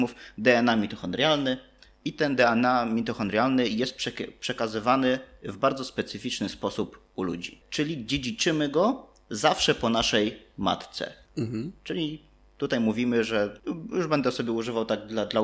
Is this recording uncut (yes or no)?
no